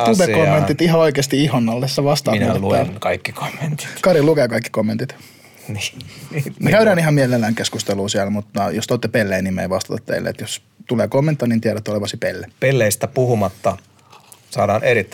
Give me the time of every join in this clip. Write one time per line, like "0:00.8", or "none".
0:11.4
0:12.5